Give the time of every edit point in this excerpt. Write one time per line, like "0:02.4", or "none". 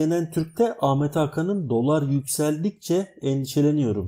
none